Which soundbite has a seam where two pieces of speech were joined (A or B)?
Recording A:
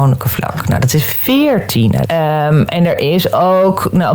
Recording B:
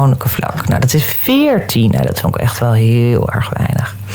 A